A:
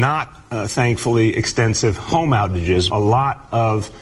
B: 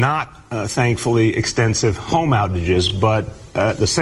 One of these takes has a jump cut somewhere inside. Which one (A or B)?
A